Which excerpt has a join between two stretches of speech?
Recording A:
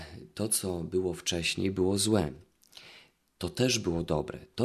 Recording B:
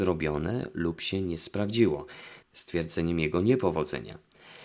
B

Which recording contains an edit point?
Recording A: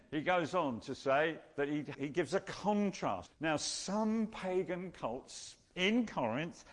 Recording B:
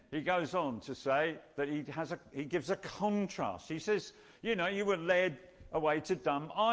A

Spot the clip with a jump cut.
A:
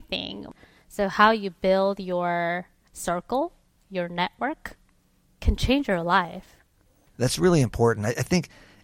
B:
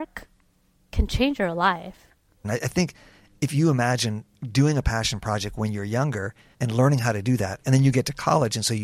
B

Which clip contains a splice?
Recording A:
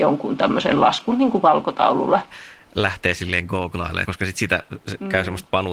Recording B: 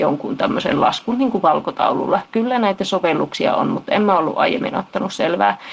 A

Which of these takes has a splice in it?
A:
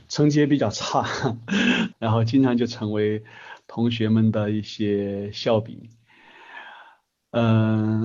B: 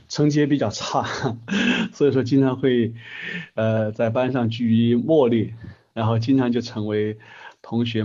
A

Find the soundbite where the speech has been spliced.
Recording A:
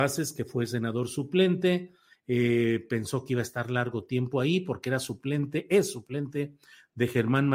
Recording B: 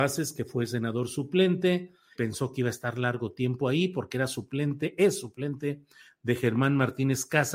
B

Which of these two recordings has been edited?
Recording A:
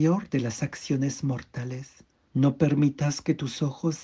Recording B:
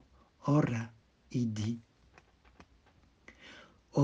A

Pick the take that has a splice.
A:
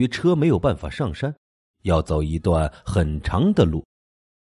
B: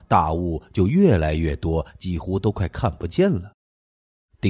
A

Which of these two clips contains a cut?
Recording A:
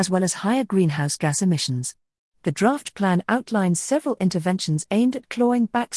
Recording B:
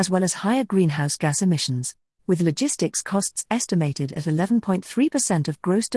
B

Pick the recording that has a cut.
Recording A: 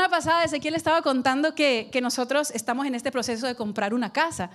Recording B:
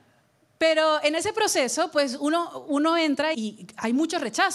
B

